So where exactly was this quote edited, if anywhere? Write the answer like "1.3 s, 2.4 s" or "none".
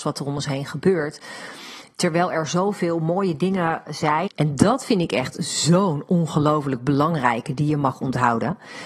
4.3 s